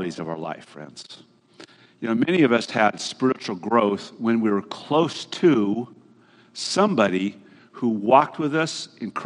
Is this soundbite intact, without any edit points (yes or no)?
yes